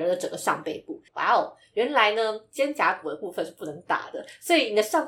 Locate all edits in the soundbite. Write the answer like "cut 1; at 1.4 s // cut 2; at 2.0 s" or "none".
cut 1; at 1.1 s